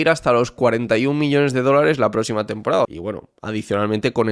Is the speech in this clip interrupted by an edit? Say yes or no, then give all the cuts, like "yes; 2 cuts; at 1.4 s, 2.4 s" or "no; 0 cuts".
yes; 1 cut; at 2.8 s